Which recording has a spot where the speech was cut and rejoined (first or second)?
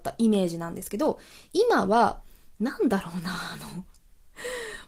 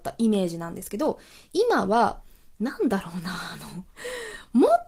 second